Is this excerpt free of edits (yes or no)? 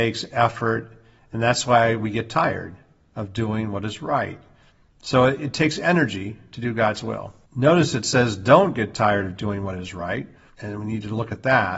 no